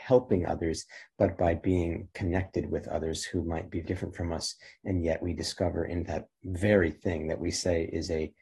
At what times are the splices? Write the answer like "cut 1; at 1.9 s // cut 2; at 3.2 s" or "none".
cut 1; at 3.8 s